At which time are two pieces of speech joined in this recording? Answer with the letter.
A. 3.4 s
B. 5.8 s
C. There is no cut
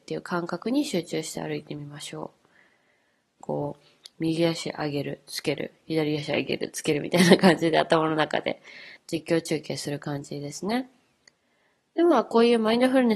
A